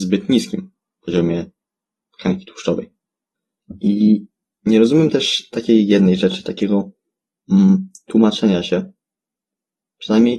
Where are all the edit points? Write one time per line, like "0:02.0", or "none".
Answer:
none